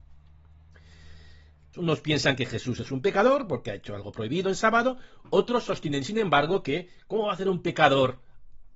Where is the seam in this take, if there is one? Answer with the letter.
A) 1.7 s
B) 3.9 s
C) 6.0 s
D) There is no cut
A